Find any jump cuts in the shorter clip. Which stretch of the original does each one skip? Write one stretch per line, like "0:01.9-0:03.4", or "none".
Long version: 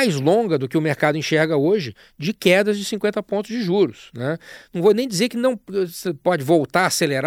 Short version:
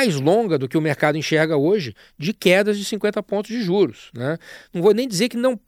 none